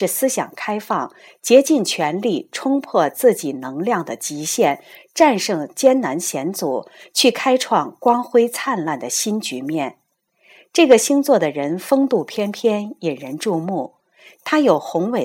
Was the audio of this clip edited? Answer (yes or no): no